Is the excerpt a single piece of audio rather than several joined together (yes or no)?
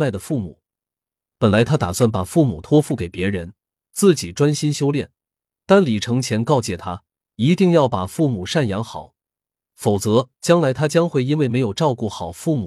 yes